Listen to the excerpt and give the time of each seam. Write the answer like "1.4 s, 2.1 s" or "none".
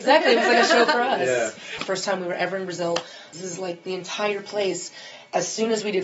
1.8 s, 3.3 s